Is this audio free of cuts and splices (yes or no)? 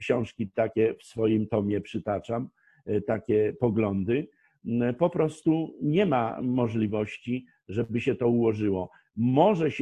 yes